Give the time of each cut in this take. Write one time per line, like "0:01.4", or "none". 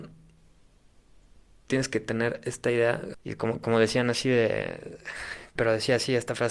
0:03.1
0:05.6